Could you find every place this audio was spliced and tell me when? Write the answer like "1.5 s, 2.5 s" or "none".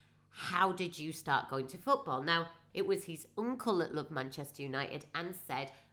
2.7 s

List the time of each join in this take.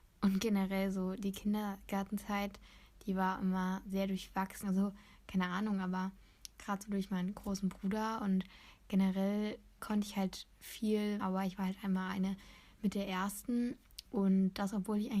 4.6 s, 9.8 s, 11.2 s

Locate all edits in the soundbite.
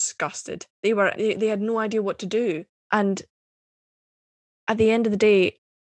1.1 s, 2.8 s

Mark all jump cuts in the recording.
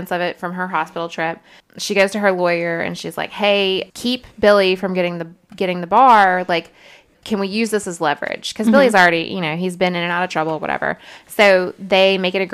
none

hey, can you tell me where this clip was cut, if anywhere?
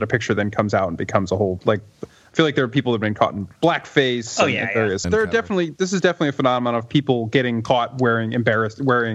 5.0 s

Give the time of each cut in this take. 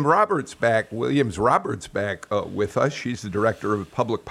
none

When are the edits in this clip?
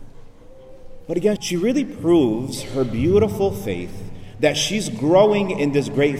1.4 s

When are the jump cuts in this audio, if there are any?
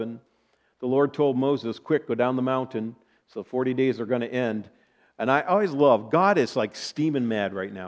none

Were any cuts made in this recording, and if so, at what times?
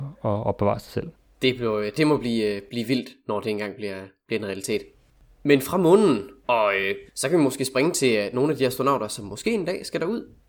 7.1 s

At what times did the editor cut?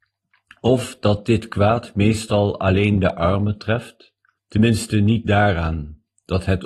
4.3 s

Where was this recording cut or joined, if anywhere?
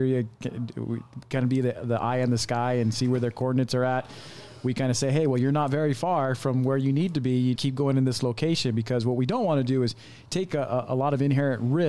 7.6 s

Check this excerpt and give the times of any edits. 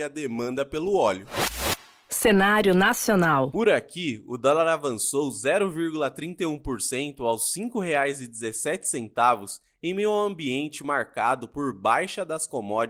none

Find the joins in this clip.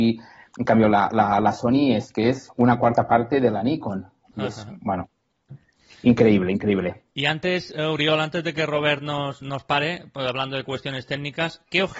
none

